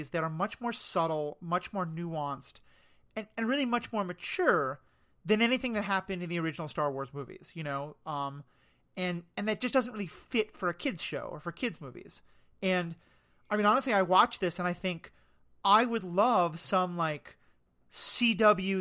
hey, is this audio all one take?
yes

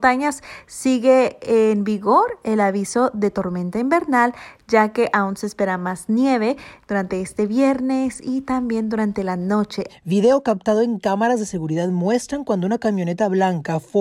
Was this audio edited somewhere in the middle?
yes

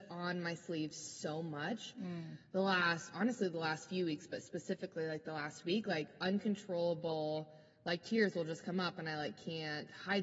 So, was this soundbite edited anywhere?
no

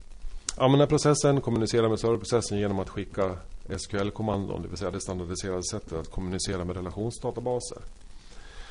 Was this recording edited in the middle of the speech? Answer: no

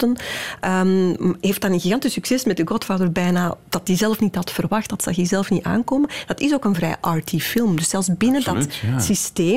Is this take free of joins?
yes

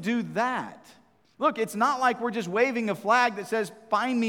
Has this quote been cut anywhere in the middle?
yes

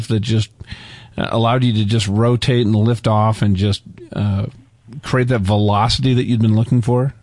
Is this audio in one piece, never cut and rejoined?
yes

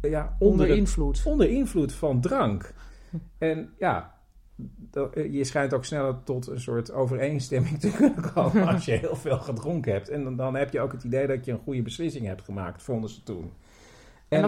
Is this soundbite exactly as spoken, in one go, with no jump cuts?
yes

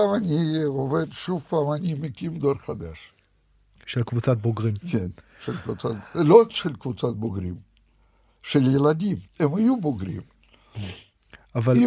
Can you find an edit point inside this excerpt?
yes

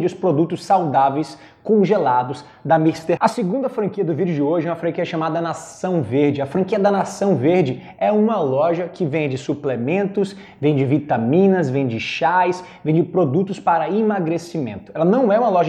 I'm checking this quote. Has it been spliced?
yes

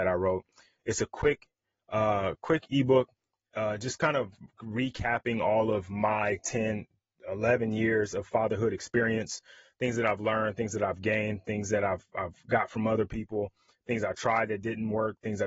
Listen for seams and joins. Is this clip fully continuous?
yes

